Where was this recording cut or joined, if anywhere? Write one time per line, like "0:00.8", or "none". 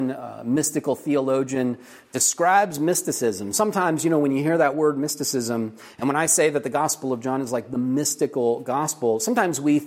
none